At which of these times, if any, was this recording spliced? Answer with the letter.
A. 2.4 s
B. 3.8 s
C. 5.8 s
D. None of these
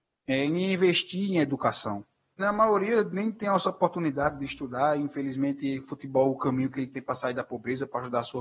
A